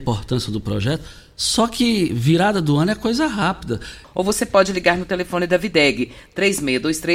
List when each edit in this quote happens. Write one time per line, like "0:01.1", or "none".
0:04.0

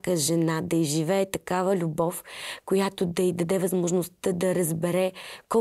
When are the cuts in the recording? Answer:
none

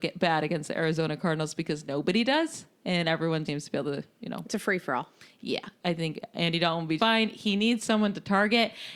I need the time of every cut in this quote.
0:03.5
0:07.0

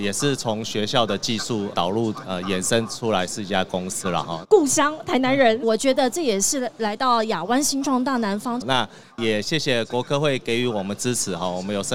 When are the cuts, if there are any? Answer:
0:04.4
0:05.6
0:08.6

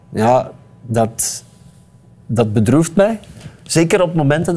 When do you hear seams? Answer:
none

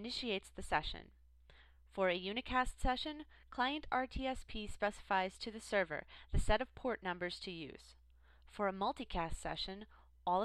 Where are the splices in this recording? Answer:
none

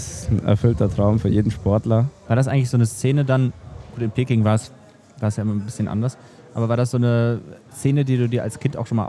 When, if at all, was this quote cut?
0:02.2

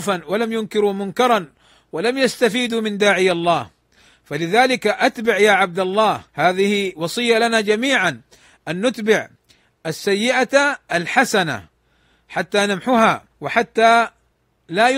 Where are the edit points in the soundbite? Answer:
0:06.3
0:13.3

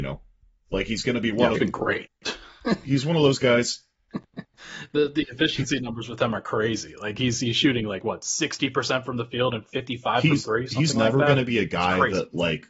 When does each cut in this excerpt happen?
0:01.5

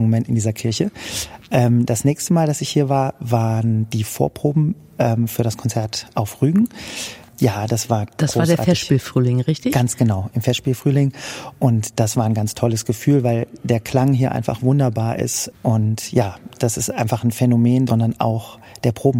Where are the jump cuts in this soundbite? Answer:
0:15.5
0:17.9

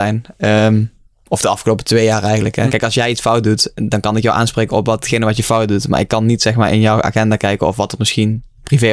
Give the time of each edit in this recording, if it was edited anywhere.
0:02.7

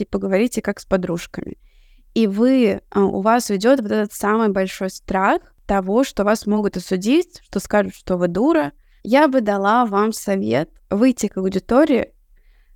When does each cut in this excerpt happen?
0:09.0
0:10.9

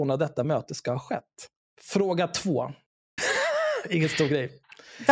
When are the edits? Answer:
0:01.6
0:03.2

